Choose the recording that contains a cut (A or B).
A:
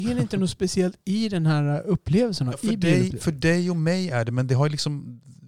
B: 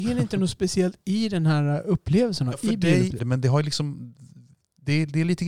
B